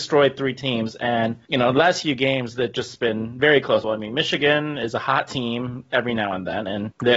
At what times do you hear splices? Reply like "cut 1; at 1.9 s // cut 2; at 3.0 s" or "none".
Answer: cut 1; at 3.8 s